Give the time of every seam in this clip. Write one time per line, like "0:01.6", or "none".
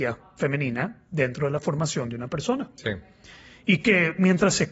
none